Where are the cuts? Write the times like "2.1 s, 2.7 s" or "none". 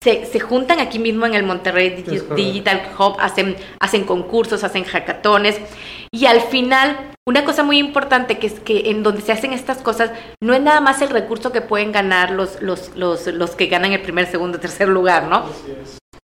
none

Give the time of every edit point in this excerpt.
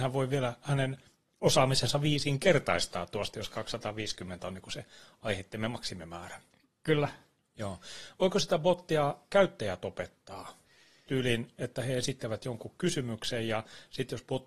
none

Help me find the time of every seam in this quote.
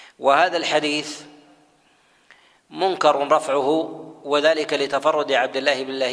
none

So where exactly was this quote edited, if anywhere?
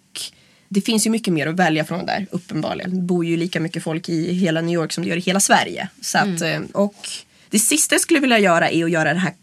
2.8 s, 6.7 s

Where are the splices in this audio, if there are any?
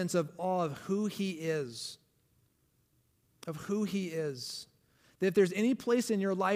none

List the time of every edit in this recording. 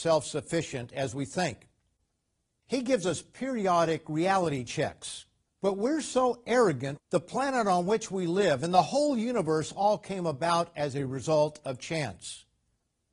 5.5 s, 7.0 s

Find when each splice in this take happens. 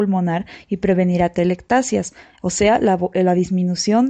none

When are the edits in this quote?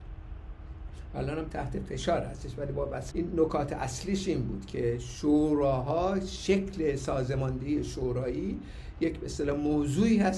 3.1 s

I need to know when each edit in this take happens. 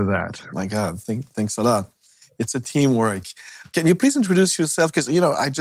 none

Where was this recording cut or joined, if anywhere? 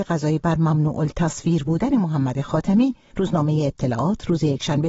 3.1 s

